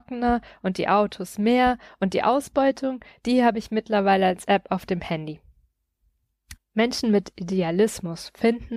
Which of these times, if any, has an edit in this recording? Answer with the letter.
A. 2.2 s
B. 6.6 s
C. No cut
B